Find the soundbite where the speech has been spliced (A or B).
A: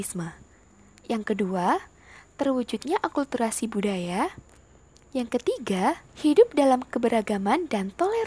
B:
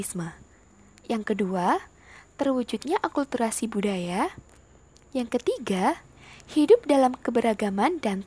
A